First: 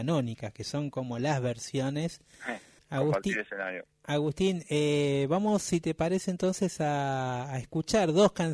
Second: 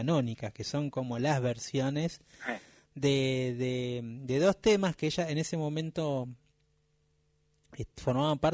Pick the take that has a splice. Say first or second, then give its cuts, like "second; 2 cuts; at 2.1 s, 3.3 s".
first; 1 cut; at 2.8 s